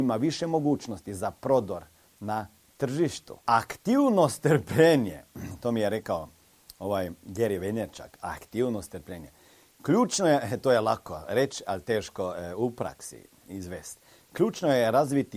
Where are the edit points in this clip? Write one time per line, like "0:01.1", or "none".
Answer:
0:03.4